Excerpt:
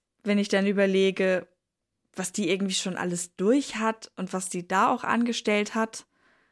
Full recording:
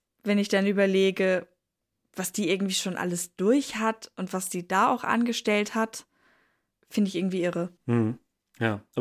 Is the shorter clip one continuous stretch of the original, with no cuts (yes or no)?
yes